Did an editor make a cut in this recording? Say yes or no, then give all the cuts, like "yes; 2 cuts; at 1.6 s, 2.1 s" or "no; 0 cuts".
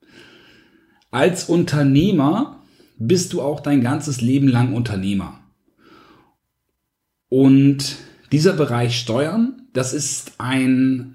no; 0 cuts